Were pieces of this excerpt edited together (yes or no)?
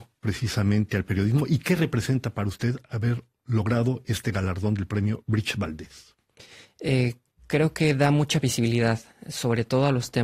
no